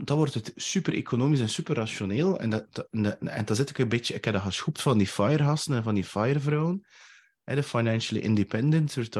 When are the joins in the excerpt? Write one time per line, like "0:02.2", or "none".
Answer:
none